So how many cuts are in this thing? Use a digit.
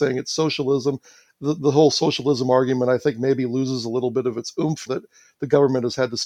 1